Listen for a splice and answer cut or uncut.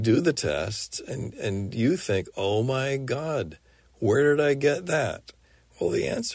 uncut